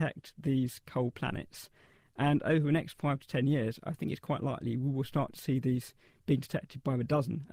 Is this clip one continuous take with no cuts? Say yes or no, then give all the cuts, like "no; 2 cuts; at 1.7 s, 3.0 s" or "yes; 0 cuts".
yes; 0 cuts